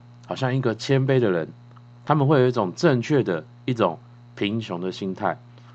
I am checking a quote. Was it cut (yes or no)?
no